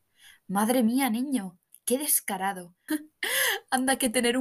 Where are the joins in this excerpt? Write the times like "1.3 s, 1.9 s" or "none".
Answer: 2.9 s